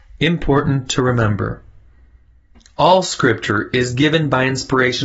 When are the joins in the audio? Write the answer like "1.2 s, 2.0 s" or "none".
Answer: none